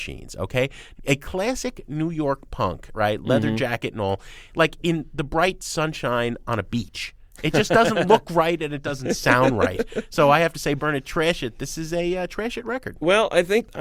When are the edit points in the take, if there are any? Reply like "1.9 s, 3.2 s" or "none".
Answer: 1.0 s, 10.8 s